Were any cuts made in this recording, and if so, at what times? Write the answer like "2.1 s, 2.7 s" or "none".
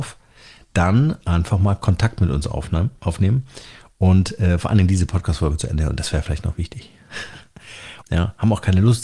8.0 s